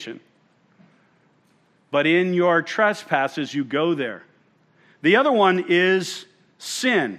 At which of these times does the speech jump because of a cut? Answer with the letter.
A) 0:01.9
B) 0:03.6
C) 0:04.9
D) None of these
D